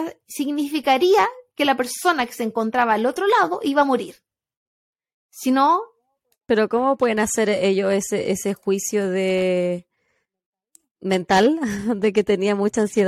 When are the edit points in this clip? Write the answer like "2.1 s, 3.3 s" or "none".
none